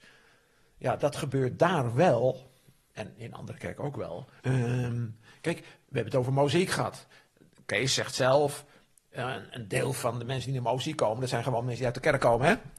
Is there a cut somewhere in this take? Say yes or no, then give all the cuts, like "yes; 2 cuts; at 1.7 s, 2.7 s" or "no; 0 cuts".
yes; 1 cut; at 4.4 s